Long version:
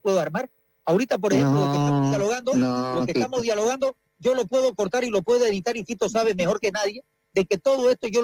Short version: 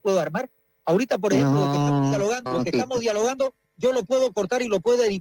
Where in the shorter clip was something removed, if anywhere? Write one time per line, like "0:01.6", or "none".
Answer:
0:02.5